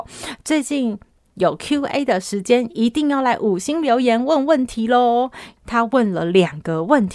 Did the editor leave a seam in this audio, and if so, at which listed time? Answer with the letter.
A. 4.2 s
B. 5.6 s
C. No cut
B